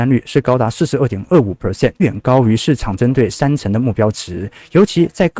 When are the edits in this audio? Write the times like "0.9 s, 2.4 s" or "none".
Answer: 2.0 s